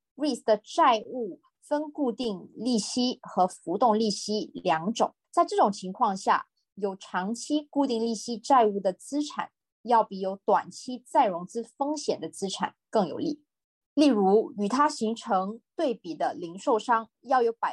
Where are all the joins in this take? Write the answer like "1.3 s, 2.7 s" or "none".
5.2 s, 13.8 s